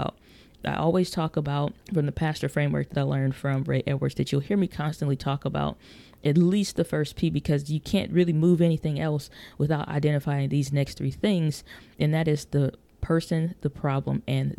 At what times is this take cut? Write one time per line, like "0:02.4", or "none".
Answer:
0:01.8